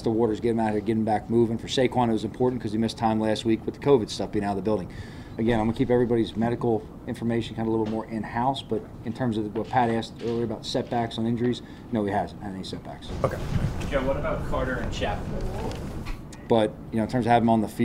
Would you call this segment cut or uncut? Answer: cut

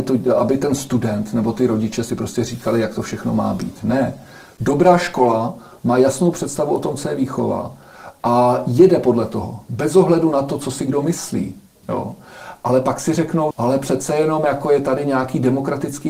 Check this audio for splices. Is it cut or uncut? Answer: cut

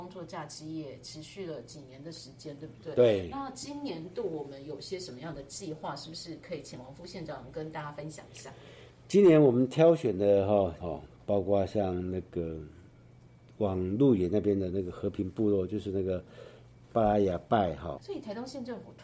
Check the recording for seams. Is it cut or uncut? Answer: cut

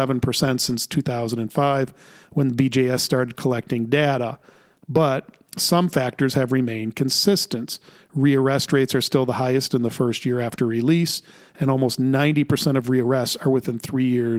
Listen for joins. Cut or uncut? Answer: uncut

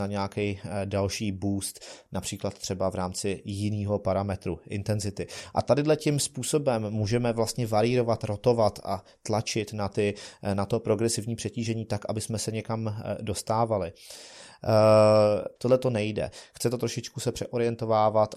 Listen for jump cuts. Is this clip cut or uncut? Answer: cut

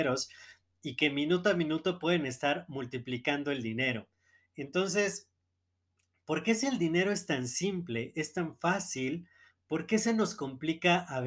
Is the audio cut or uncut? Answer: uncut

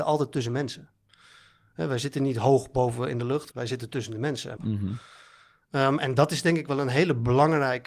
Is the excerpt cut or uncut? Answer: cut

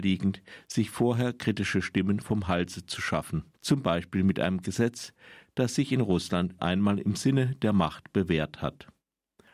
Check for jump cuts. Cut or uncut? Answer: cut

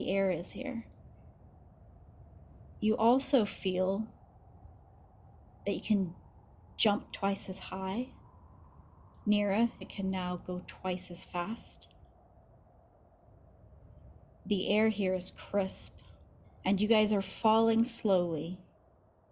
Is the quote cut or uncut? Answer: cut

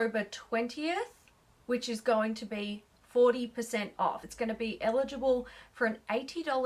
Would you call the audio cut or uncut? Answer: cut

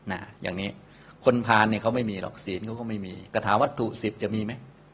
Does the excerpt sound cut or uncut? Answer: cut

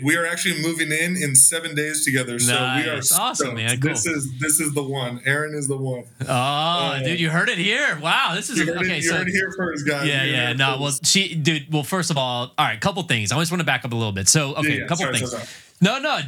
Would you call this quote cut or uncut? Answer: uncut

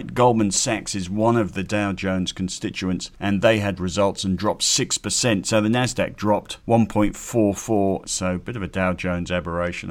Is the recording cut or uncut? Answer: cut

